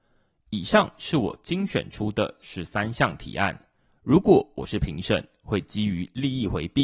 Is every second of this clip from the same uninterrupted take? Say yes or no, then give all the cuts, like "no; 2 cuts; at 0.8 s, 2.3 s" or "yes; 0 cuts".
yes; 0 cuts